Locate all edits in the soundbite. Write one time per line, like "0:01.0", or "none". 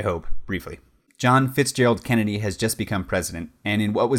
0:01.1